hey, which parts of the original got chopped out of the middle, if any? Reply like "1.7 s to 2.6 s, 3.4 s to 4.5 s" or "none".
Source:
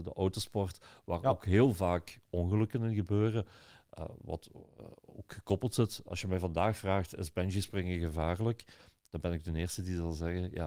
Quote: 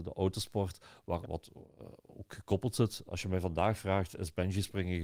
1.2 s to 4.2 s